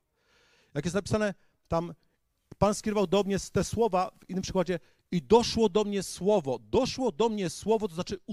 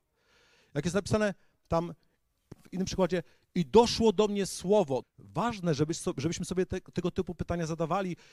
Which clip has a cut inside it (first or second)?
second